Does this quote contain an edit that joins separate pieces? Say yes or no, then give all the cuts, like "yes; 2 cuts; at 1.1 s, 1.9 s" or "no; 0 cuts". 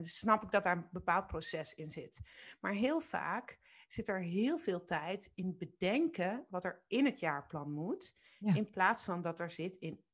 no; 0 cuts